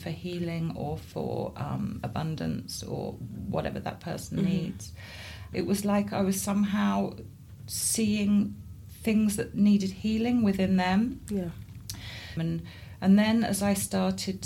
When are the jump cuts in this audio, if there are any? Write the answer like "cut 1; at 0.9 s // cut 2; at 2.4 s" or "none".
cut 1; at 5.5 s // cut 2; at 12.4 s